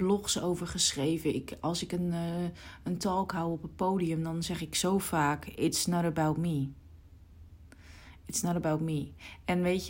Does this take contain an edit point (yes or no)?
no